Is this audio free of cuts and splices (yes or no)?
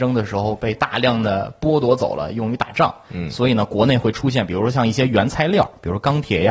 yes